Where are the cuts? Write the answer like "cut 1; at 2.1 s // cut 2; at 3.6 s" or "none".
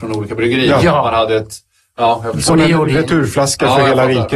none